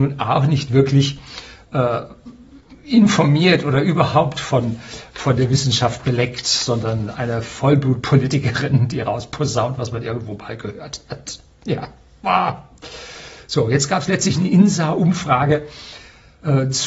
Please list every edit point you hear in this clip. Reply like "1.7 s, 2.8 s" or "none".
none